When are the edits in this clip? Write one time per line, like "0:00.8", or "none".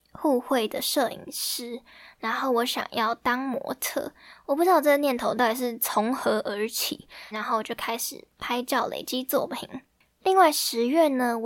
0:07.3